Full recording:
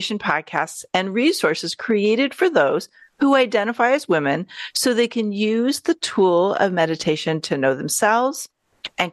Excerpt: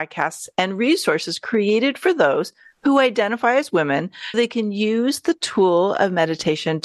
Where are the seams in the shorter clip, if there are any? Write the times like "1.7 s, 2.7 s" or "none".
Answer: 4.3 s